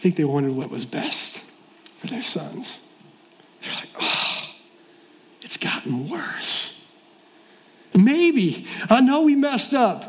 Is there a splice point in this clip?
yes; 2 cuts; at 3.5 s, 7.9 s

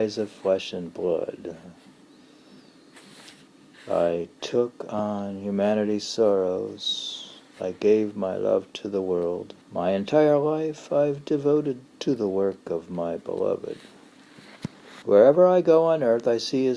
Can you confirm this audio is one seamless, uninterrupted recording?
no; 2 cuts; at 9.6 s, 15.0 s

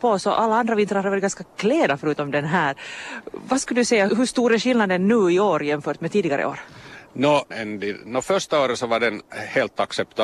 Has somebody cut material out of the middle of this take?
yes; 2 cuts; at 4.1 s, 7.5 s

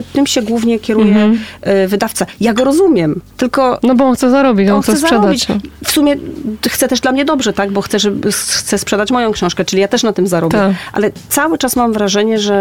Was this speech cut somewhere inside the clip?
yes; 1 cut; at 3.3 s

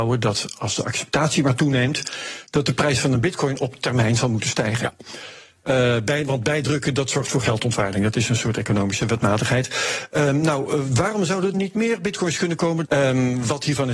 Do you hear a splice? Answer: yes; 2 cuts; at 11.5 s, 12.8 s

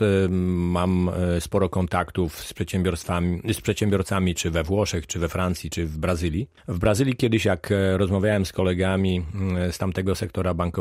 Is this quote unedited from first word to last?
no; 1 cut; at 6.6 s

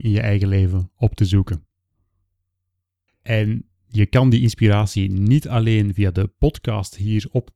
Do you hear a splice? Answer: yes; 1 cut; at 3.1 s

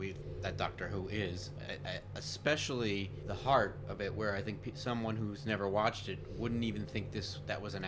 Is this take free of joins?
yes; 0 cuts

